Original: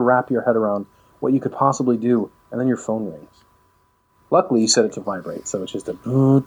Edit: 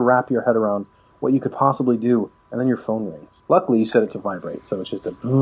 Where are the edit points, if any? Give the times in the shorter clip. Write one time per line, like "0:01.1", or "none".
0:03.4